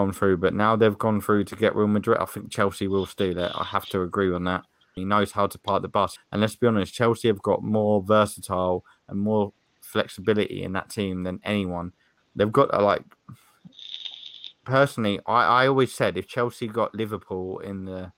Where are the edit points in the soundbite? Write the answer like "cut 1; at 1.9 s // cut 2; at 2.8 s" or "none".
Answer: cut 1; at 5.0 s // cut 2; at 6.2 s // cut 3; at 12.2 s